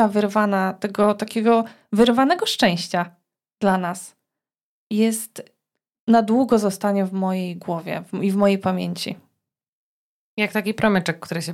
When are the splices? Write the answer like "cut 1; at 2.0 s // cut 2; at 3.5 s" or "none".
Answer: none